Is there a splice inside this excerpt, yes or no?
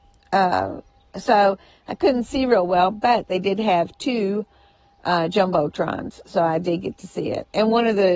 no